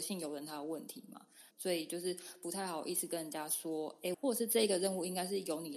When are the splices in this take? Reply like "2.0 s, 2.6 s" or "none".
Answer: 1.5 s, 4.1 s